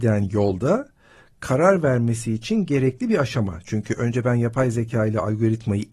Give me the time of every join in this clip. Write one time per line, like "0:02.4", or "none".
none